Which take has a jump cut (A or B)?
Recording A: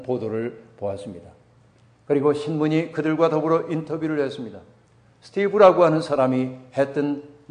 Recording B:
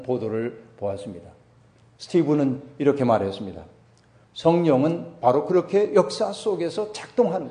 B